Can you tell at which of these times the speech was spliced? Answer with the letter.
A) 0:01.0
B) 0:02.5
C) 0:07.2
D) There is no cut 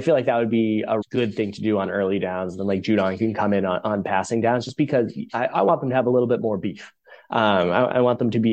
A